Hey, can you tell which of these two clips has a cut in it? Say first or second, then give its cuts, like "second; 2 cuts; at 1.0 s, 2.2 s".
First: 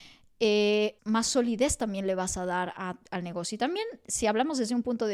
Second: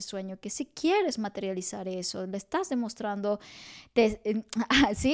first; 1 cut; at 1.0 s